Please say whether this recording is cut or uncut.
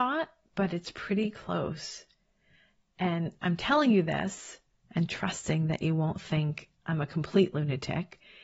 uncut